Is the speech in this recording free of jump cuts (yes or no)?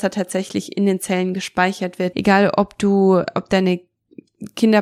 no